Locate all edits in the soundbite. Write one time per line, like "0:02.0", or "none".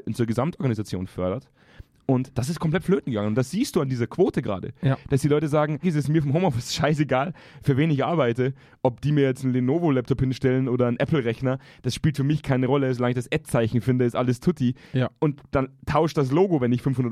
0:05.8

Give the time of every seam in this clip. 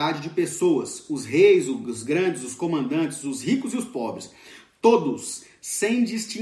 none

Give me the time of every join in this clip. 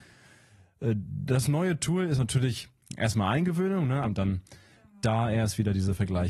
0:04.0

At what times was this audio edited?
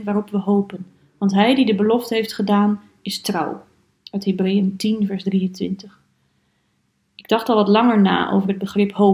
none

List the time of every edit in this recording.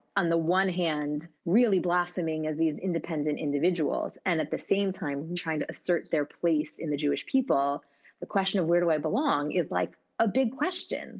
0:01.4
0:05.3

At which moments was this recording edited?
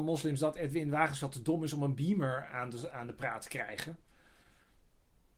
none

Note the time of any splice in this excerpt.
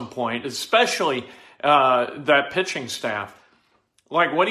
none

